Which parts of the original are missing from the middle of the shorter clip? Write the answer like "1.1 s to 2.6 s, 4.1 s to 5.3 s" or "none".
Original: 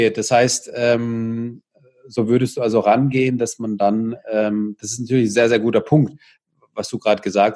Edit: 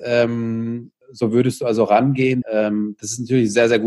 1.7 s to 2.0 s, 3.4 s to 4.2 s